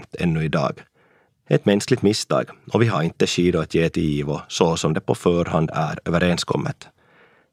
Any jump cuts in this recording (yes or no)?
yes